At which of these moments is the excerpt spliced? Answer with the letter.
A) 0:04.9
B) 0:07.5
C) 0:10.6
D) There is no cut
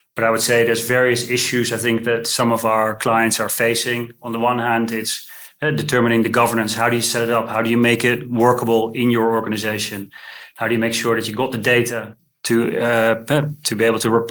C